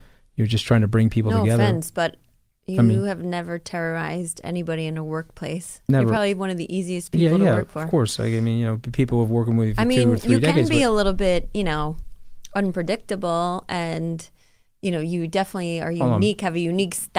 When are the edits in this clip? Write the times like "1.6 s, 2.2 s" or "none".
none